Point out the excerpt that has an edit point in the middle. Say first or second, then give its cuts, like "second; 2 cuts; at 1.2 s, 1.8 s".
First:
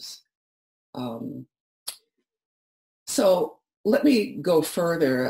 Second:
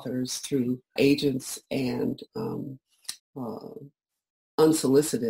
second; 2 cuts; at 1.0 s, 3.2 s